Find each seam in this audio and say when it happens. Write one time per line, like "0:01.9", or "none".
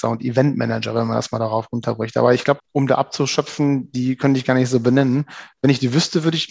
0:02.6